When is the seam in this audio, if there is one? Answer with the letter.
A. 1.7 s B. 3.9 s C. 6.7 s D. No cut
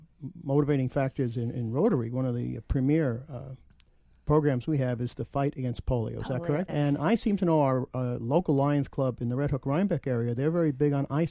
C